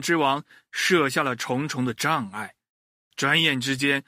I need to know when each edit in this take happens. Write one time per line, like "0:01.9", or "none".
none